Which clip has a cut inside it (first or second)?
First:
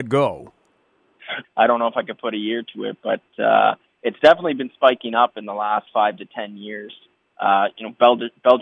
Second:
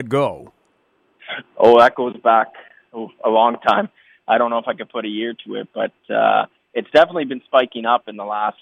first